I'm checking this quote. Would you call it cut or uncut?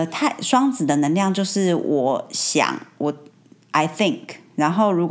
uncut